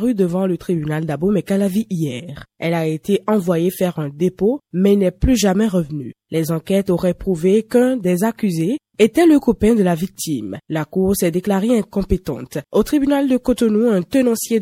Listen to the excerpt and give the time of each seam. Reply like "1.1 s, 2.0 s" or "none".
2.5 s, 10.6 s, 12.6 s